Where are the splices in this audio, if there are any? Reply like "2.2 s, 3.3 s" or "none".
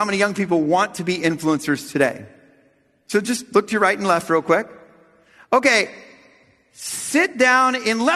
none